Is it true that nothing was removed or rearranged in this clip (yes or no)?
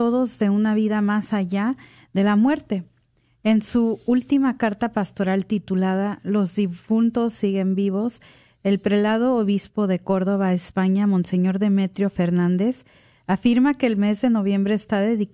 yes